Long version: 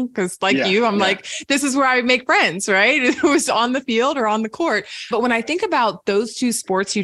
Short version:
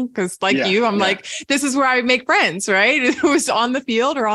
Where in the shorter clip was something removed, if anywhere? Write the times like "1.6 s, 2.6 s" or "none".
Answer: none